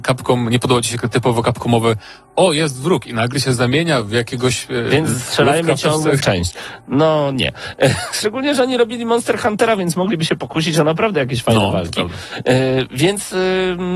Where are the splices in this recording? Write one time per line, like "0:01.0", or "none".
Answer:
0:06.2